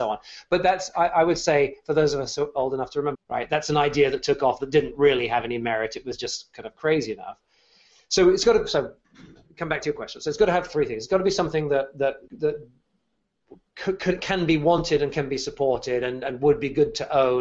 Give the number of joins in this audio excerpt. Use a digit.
2